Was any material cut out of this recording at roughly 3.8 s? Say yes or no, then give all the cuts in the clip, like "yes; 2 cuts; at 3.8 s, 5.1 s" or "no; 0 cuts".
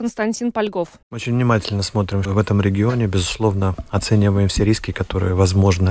no; 2 cuts; at 1.0 s, 2.2 s